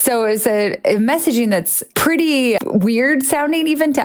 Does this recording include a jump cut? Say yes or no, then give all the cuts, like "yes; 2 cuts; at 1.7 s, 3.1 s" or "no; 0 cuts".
yes; 1 cut; at 2.6 s